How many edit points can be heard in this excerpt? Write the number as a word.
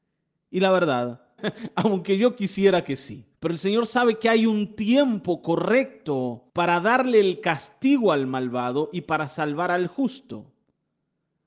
three